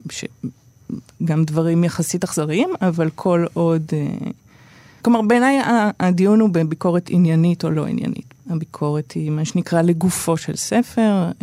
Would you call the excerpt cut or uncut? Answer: cut